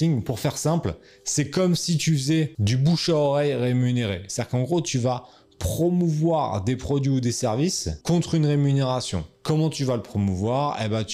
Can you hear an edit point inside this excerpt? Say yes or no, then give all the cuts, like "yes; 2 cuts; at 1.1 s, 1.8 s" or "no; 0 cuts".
no; 0 cuts